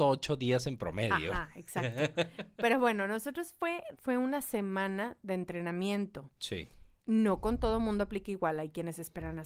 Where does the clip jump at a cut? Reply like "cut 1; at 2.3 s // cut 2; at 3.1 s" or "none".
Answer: cut 1; at 3.9 s // cut 2; at 7.0 s